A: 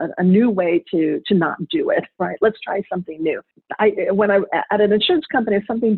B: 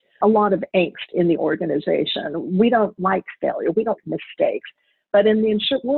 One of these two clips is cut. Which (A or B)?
B